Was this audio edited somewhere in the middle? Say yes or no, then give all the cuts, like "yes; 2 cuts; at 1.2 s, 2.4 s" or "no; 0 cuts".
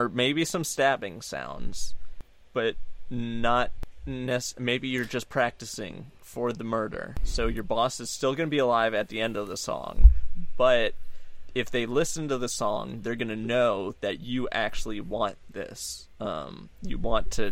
no; 0 cuts